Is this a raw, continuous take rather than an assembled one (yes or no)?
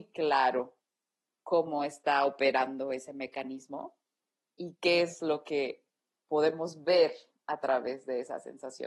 yes